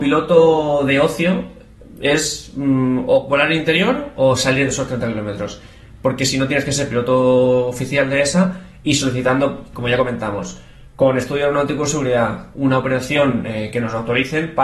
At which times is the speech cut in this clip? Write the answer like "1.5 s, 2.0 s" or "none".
12.5 s